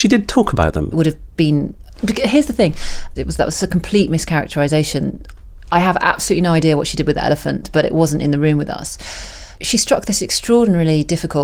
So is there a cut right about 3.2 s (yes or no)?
yes